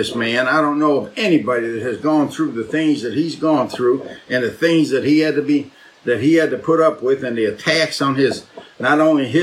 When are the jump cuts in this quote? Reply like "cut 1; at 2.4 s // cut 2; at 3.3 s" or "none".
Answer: none